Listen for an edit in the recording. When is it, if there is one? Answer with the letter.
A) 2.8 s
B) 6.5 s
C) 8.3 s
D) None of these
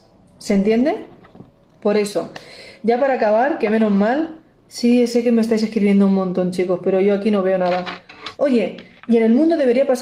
C